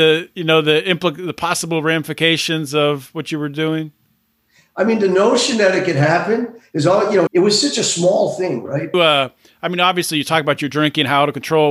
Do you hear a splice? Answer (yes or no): yes